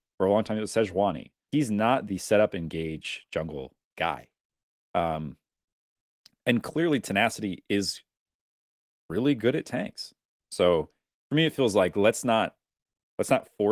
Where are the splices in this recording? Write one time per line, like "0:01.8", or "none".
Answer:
0:01.5